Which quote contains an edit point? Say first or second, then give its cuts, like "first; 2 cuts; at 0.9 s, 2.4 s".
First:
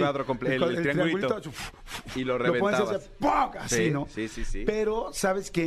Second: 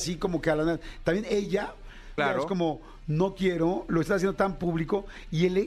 second; 1 cut; at 2.2 s